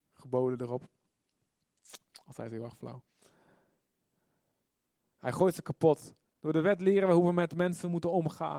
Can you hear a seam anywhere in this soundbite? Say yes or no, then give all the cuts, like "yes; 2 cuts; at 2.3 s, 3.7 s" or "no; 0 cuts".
yes; 2 cuts; at 2.1 s, 6.3 s